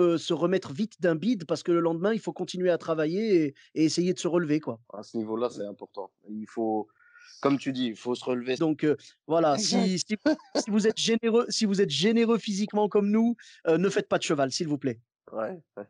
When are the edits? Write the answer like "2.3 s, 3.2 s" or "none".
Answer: 4.8 s, 8.6 s